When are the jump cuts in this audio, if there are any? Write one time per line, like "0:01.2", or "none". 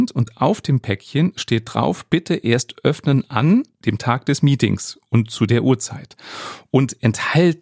none